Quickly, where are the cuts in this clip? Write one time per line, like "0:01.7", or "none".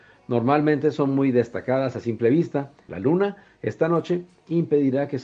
0:02.9